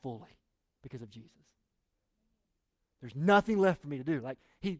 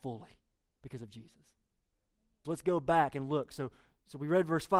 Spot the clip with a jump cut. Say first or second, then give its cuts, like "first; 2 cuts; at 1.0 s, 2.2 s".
second; 1 cut; at 2.4 s